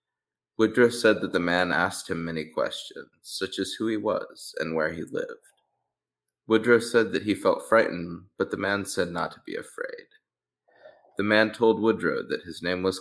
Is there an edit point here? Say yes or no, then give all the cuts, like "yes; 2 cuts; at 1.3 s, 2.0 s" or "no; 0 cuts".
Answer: no; 0 cuts